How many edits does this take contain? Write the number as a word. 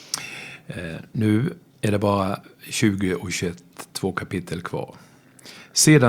zero